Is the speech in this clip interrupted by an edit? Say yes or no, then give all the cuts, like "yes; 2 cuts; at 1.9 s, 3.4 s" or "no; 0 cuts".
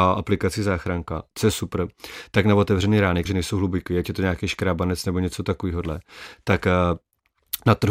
yes; 1 cut; at 3.3 s